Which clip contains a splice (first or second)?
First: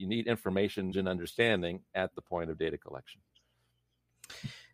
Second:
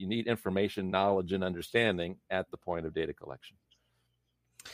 first